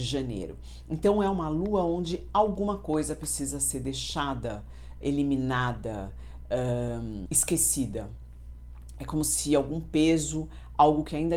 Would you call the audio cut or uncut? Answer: cut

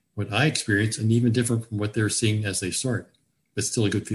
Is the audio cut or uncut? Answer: uncut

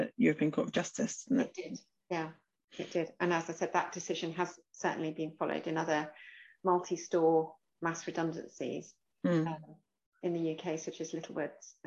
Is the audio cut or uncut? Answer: uncut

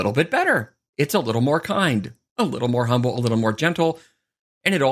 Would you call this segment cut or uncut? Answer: uncut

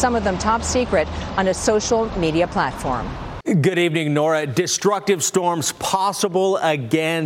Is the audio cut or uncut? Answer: cut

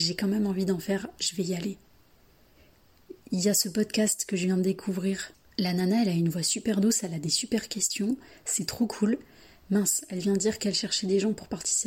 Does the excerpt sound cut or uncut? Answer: uncut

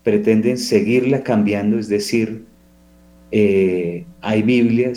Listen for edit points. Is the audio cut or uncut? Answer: uncut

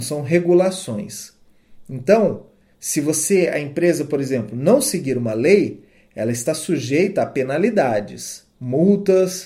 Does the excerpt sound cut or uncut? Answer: cut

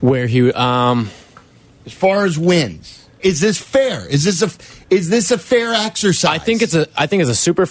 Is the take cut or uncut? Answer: cut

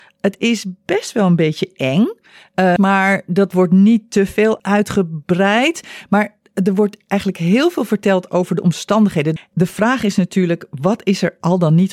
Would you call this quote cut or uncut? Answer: cut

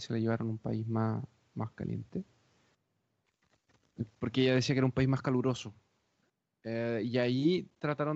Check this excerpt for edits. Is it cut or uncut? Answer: uncut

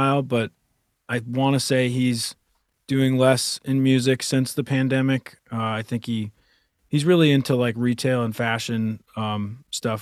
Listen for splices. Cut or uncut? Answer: uncut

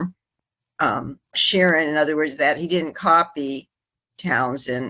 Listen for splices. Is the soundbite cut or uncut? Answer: cut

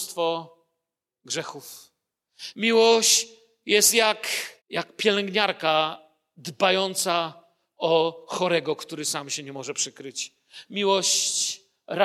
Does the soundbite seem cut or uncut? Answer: cut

